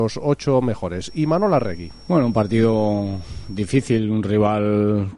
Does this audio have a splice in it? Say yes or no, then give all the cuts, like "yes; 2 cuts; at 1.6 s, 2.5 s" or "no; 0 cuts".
no; 0 cuts